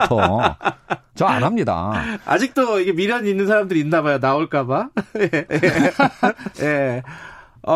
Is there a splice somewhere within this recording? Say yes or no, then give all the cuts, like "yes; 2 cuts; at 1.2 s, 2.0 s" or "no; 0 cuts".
yes; 2 cuts; at 5.5 s, 6.5 s